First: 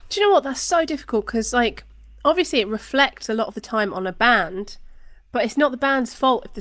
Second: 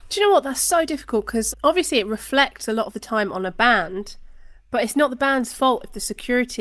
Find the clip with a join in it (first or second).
second